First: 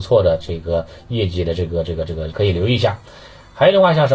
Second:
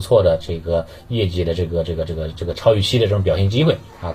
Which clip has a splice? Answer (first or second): first